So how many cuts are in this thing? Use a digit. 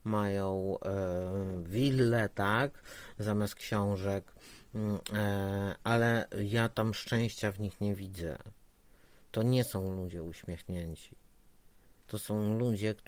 0